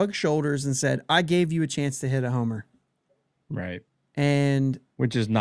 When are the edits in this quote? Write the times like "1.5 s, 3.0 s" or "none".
3.4 s